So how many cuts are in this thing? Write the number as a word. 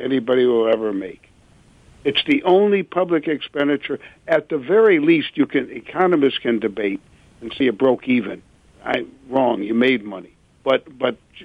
one